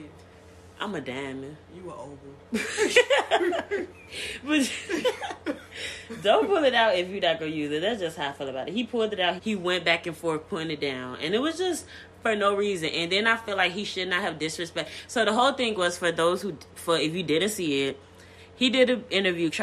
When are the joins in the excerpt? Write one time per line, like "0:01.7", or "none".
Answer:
0:09.4